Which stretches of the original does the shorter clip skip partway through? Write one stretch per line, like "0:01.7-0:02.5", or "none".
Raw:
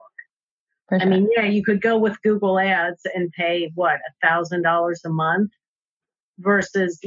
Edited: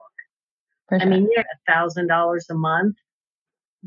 0:01.4-0:04.0